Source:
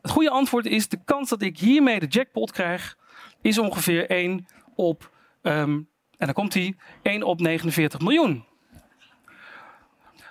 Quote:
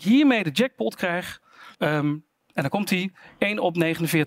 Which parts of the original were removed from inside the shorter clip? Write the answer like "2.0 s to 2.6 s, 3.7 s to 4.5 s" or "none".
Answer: 3.3 s to 5.4 s